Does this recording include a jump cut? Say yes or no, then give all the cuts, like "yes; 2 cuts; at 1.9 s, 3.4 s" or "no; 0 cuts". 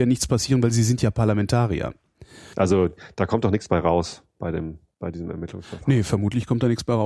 yes; 1 cut; at 2.5 s